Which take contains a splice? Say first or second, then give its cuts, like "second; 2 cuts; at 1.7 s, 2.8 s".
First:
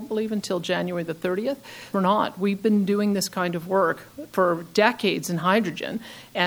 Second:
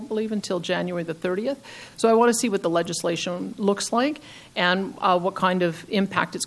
first; 1 cut; at 1.9 s